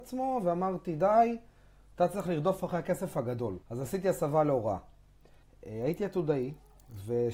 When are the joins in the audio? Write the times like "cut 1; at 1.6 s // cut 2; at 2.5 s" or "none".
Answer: cut 1; at 3.6 s // cut 2; at 5.4 s